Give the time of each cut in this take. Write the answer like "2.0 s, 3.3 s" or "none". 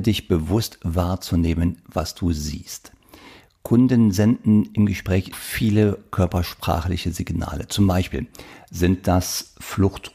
5.3 s